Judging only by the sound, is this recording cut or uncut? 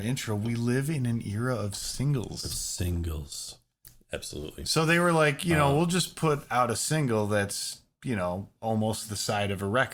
uncut